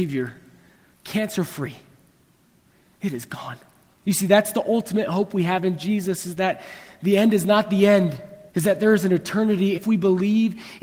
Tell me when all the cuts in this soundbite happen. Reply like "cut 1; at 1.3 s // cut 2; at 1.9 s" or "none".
cut 1; at 4.0 s // cut 2; at 8.5 s // cut 3; at 9.7 s